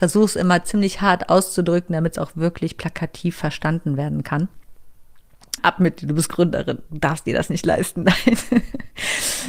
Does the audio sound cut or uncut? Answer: cut